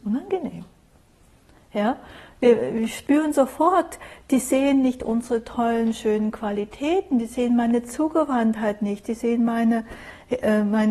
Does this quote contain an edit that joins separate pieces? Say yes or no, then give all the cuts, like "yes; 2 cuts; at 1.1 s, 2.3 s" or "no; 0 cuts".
no; 0 cuts